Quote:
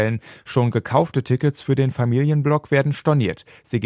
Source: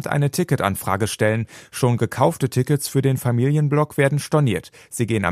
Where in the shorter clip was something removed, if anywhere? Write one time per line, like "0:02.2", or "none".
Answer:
none